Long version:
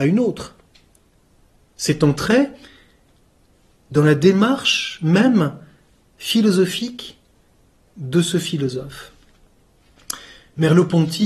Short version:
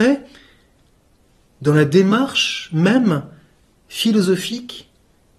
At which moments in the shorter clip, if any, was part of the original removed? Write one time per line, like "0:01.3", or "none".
none